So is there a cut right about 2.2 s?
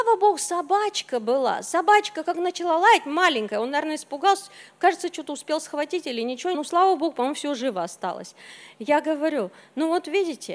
no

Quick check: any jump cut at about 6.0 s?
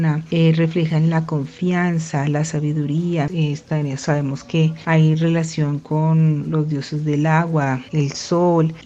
no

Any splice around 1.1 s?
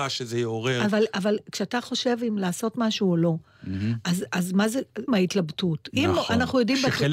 no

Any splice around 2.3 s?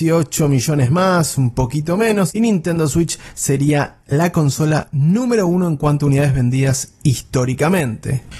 yes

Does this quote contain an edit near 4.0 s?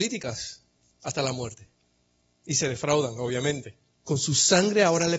yes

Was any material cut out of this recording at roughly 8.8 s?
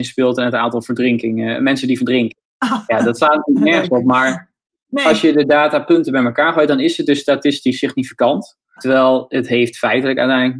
yes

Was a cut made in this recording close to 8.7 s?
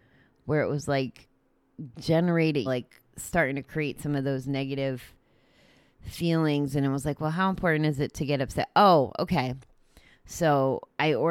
no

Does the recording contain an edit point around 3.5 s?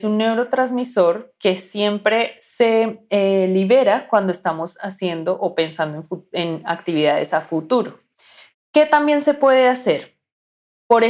no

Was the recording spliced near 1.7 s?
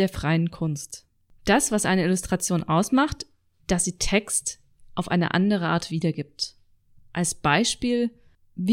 no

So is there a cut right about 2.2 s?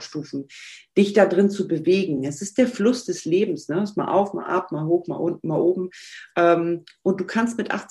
no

